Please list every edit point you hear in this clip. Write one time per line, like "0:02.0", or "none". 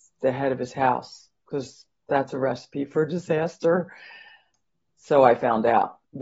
none